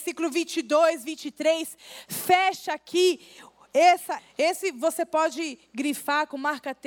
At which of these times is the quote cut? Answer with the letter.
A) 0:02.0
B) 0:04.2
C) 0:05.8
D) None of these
B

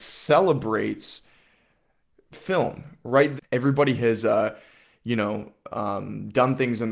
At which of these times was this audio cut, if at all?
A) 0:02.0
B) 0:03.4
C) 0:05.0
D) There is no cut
B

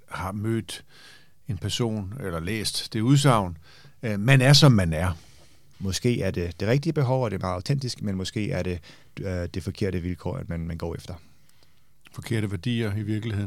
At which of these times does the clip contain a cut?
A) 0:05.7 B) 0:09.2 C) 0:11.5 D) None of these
A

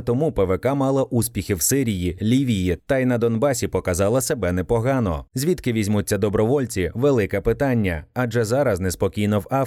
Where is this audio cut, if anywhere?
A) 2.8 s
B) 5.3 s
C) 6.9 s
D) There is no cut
B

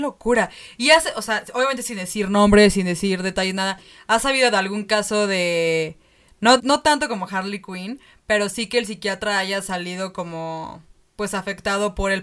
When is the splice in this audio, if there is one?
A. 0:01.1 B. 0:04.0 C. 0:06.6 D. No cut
C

